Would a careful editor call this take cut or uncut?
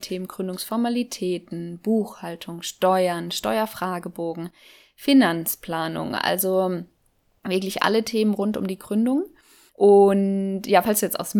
uncut